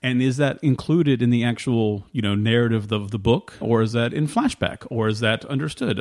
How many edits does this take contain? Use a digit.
1